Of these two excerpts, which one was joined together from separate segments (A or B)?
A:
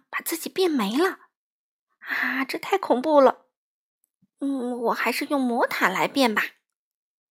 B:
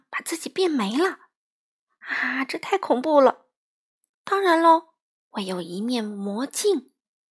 B